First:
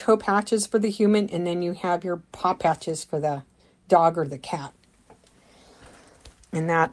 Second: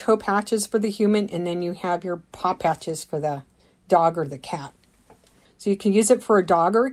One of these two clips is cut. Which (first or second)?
second